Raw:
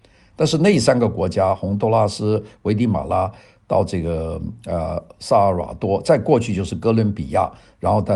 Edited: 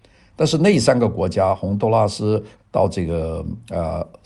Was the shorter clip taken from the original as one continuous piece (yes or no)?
no